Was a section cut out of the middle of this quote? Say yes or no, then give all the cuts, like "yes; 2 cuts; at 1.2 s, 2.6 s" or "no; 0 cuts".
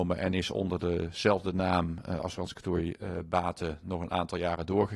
no; 0 cuts